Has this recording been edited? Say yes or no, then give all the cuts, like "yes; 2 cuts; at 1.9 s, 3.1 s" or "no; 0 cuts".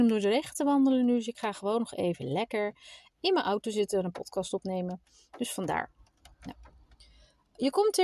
no; 0 cuts